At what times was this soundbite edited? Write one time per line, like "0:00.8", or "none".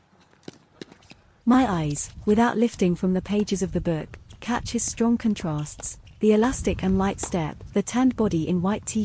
0:01.4
0:07.7